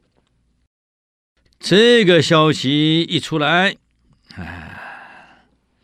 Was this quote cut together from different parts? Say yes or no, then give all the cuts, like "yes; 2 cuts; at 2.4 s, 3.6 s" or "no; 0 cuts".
yes; 1 cut; at 1.5 s